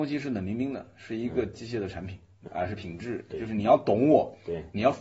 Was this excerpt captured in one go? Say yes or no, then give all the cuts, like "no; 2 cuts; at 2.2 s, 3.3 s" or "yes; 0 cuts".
no; 1 cut; at 2.5 s